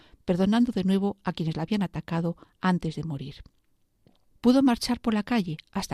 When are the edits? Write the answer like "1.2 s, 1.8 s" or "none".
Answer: 4.3 s